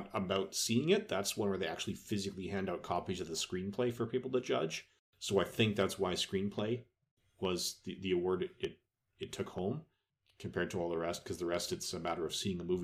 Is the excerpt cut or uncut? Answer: uncut